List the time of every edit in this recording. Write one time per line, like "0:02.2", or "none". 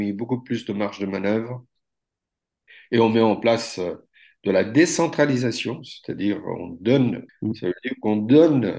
0:07.3